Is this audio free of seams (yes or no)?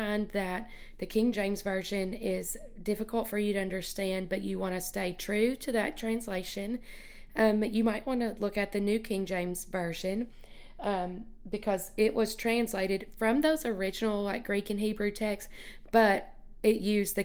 yes